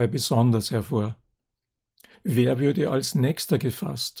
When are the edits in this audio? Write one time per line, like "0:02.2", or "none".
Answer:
0:02.1